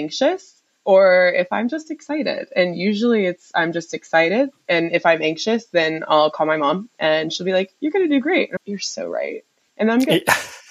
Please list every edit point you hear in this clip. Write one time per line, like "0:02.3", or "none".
0:08.6